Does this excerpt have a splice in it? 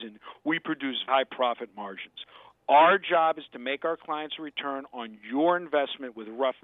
yes; 1 cut; at 1.1 s

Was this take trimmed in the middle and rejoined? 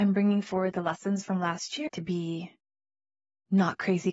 yes; 1 cut; at 1.9 s

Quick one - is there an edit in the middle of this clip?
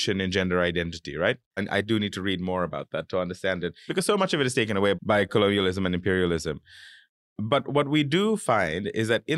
yes; 3 cuts; at 1.6 s, 3.9 s, 4.9 s

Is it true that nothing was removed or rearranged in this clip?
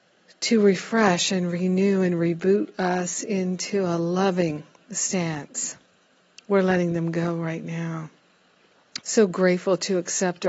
no; 1 cut; at 9.0 s

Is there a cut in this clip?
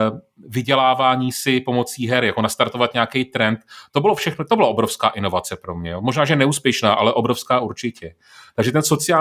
no; 0 cuts

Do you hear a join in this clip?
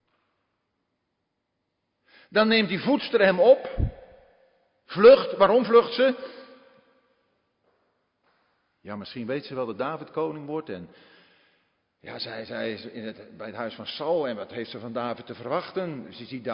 no; 0 cuts

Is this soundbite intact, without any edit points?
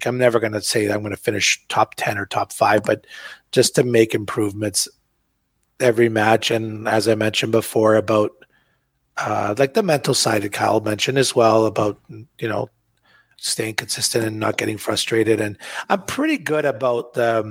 no; 1 cut; at 13.4 s

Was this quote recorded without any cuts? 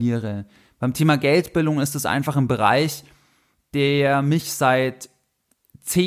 yes; 0 cuts

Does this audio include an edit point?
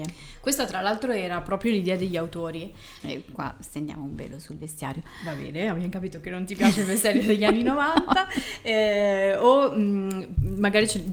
yes; 1 cut; at 3.0 s

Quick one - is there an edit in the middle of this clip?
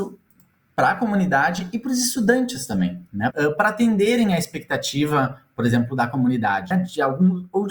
yes; 2 cuts; at 3.3 s, 6.7 s

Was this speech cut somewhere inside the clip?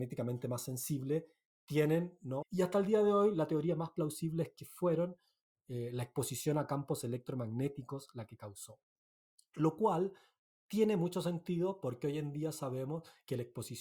yes; 1 cut; at 2.4 s

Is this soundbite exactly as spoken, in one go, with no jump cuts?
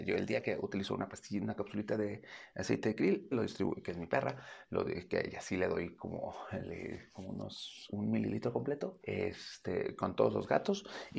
no; 2 cuts; at 3.3 s, 9.0 s

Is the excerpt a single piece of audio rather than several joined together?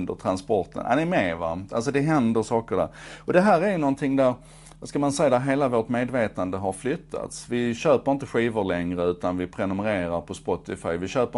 yes; 0 cuts

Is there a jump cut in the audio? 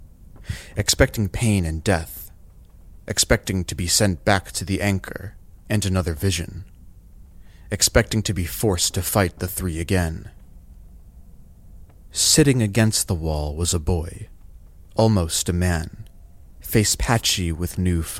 yes; 2 cuts; at 3.0 s, 12.1 s

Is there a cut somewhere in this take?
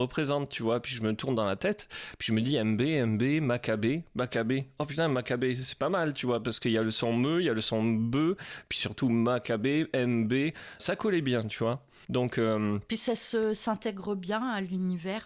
yes; 1 cut; at 10.8 s

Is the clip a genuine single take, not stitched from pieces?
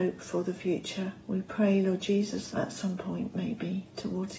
no; 2 cuts; at 1.2 s, 2.5 s

